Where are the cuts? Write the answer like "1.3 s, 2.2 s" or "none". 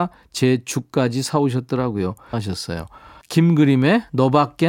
2.3 s